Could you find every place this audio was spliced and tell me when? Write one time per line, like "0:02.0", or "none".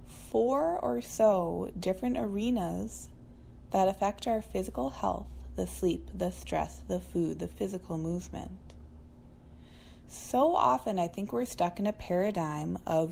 none